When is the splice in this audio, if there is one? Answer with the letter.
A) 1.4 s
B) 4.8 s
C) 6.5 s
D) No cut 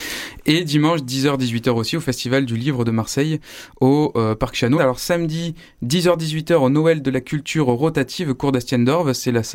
B